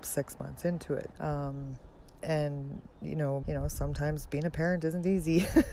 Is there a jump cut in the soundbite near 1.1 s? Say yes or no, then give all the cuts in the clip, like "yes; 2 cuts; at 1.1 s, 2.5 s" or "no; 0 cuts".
yes; 2 cuts; at 1.1 s, 3.4 s